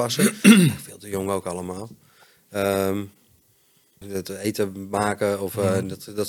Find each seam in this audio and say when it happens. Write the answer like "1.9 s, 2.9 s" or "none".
4.0 s